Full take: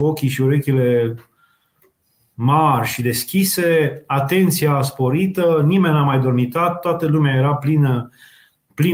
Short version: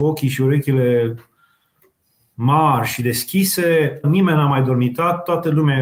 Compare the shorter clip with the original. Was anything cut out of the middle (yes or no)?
yes